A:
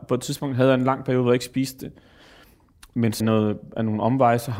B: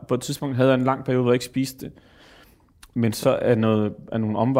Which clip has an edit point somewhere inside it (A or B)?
A